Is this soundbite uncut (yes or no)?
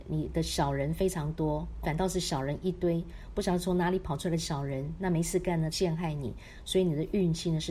no